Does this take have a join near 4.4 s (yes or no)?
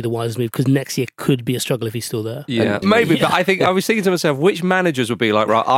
no